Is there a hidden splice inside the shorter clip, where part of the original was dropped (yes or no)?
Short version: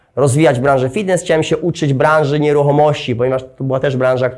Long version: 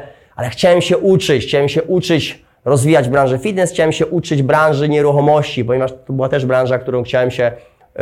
no